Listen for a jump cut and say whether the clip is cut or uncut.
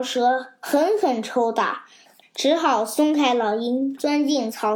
cut